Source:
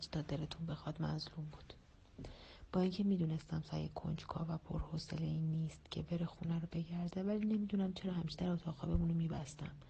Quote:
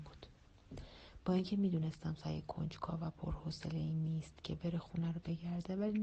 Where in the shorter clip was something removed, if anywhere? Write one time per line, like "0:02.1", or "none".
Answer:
none